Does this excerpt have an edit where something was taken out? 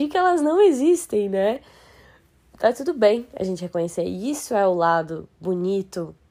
no; 0 cuts

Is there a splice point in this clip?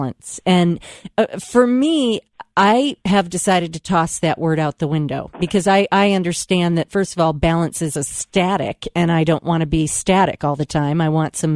yes; 1 cut; at 8.0 s

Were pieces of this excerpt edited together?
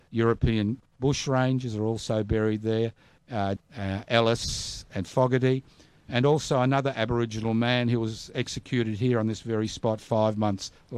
yes; 1 cut; at 3.6 s

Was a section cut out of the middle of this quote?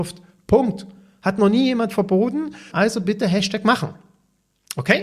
yes; 1 cut; at 2.7 s

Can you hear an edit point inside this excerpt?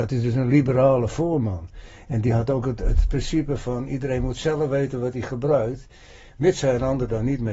no; 0 cuts

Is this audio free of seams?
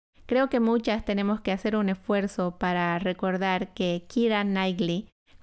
yes; 0 cuts

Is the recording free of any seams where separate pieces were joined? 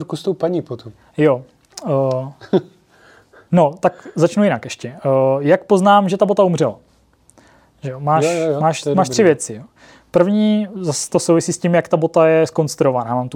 yes; 0 cuts

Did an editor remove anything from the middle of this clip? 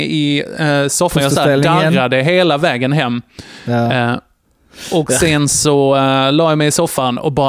no; 0 cuts

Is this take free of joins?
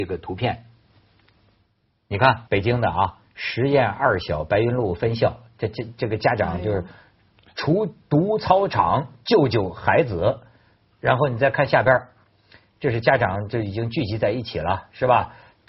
no; 1 cut; at 2.5 s

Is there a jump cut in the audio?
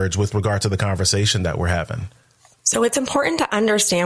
no; 0 cuts

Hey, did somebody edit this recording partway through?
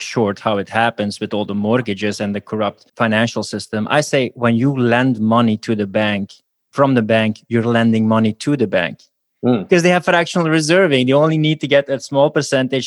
yes; 1 cut; at 2.9 s

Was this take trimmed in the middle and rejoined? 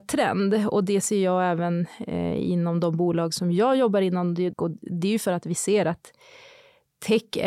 yes; 1 cut; at 4.5 s

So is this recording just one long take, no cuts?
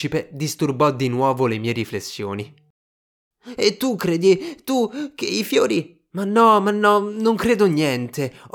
yes; 0 cuts

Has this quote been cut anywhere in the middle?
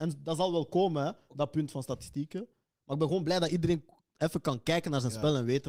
no; 0 cuts

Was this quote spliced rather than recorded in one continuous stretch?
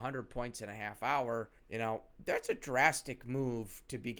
yes; 1 cut; at 1.6 s

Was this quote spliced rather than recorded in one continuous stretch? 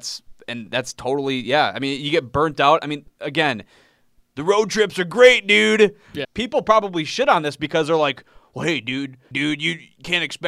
yes; 2 cuts; at 6.2 s, 9.3 s

